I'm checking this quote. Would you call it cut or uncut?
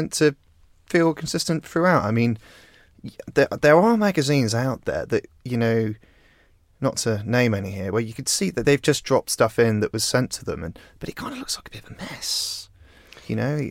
uncut